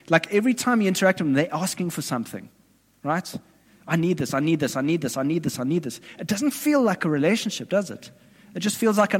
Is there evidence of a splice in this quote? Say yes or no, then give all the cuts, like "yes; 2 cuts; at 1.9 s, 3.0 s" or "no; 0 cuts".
no; 0 cuts